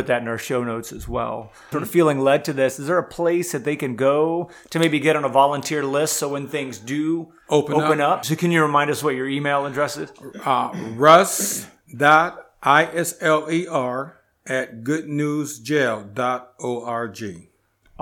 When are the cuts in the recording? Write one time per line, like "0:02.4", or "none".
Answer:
0:01.7
0:08.2